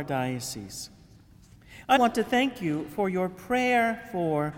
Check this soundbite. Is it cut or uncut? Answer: cut